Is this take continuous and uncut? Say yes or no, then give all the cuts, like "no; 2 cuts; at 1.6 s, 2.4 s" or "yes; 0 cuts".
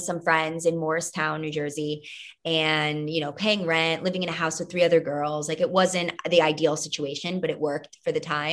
yes; 0 cuts